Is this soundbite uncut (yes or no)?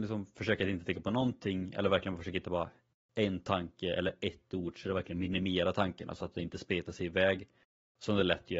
yes